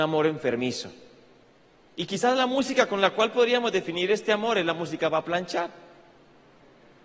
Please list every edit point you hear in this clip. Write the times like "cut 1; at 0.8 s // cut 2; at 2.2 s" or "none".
none